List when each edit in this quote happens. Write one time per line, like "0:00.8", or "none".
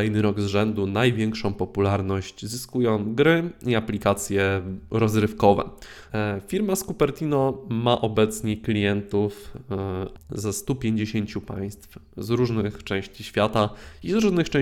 0:06.1
0:10.2